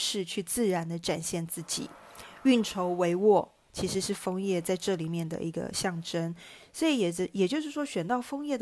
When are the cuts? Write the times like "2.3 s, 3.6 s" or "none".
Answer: none